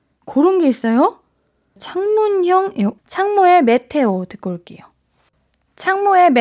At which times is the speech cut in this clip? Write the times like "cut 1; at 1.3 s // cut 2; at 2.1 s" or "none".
cut 1; at 1.8 s // cut 2; at 3.0 s